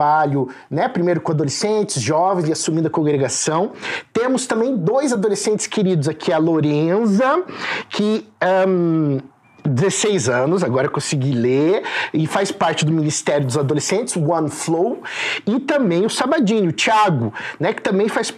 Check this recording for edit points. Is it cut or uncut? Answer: uncut